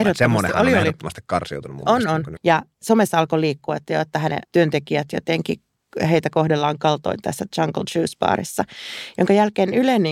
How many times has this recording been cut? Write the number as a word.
two